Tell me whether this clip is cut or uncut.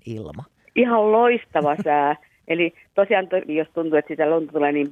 cut